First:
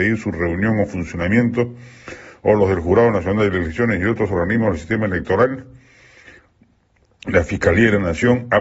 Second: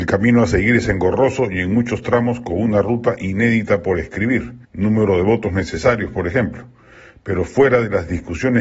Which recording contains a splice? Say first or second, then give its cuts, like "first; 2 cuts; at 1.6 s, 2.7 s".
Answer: second; 1 cut; at 4.6 s